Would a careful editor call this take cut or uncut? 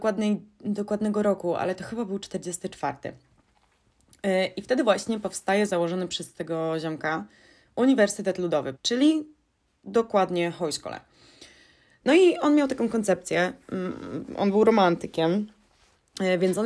cut